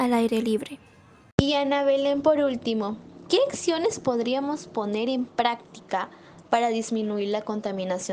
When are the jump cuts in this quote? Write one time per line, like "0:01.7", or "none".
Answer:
none